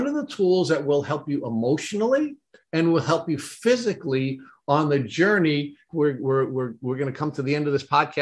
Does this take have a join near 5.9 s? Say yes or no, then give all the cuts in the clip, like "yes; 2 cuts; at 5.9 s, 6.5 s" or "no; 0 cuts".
yes; 1 cut; at 5.9 s